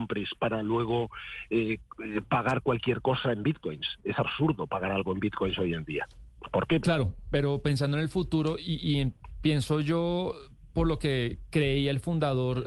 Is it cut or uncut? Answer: cut